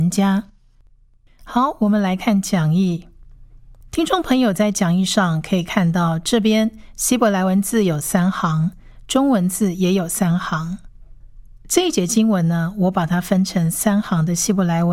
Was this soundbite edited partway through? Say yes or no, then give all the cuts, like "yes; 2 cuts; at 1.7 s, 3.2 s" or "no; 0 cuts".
no; 0 cuts